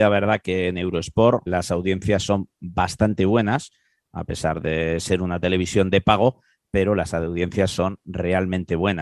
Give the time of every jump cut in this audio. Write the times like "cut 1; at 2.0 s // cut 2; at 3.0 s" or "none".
cut 1; at 1.5 s